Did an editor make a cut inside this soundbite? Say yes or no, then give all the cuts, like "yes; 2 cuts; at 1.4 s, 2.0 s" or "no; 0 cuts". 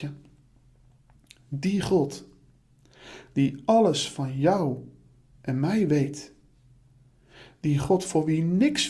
no; 0 cuts